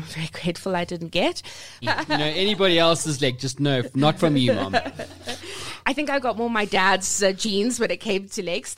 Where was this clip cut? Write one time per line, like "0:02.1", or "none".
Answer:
0:01.8
0:05.8